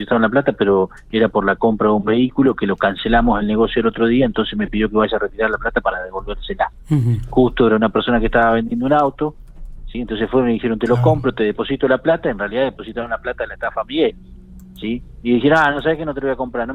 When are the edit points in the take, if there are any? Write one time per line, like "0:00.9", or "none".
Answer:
none